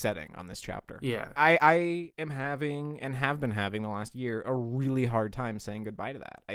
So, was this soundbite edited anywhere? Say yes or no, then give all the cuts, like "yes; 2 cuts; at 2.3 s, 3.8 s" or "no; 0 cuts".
no; 0 cuts